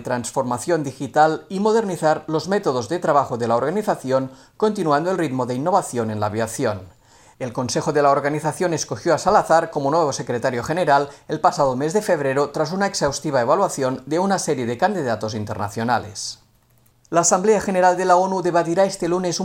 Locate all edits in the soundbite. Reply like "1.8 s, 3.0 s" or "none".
none